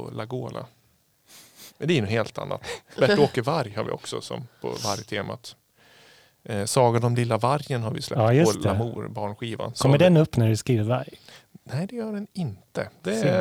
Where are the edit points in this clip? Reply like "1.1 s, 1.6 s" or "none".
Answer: 1.7 s